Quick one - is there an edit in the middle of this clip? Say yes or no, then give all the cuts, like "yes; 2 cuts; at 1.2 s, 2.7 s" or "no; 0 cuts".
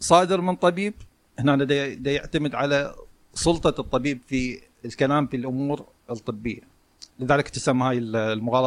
yes; 2 cuts; at 2.0 s, 7.1 s